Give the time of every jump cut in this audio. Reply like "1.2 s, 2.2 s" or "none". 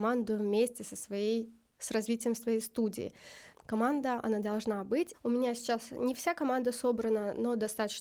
3.5 s, 5.1 s